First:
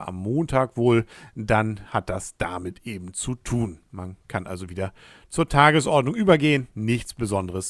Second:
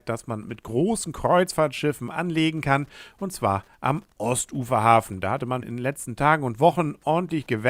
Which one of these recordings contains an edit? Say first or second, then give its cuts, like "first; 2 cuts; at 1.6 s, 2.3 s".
second; 1 cut; at 5.6 s